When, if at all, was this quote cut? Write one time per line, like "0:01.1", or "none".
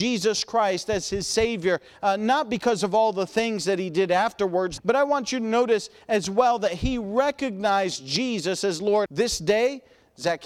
0:04.8
0:09.1